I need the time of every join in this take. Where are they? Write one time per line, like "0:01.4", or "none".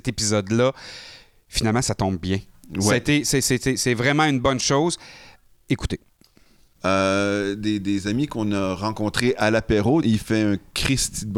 0:06.8
0:10.0